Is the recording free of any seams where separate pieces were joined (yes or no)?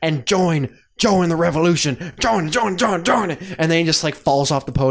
yes